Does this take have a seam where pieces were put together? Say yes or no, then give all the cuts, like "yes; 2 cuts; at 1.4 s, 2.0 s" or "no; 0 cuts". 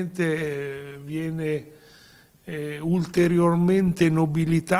no; 0 cuts